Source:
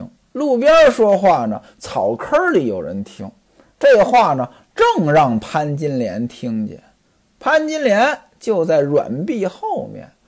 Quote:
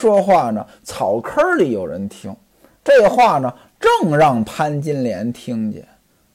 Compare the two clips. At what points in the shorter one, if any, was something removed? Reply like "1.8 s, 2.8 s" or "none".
none